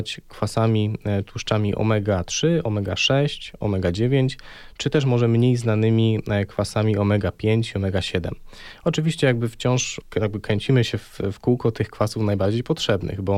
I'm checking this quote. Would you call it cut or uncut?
uncut